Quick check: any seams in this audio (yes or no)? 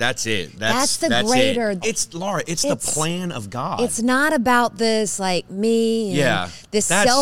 yes